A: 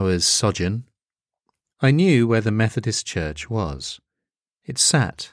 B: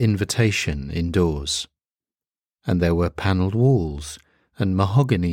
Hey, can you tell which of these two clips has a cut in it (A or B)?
A